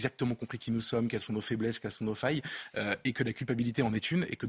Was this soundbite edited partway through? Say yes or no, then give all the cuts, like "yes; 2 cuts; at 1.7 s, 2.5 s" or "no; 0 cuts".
no; 0 cuts